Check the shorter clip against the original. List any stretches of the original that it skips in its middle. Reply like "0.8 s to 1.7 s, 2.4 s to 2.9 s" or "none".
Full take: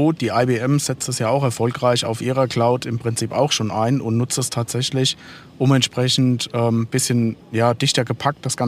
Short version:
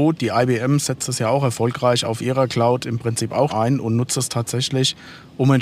3.5 s to 3.7 s